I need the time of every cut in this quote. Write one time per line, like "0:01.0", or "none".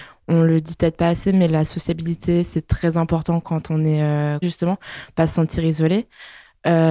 0:04.4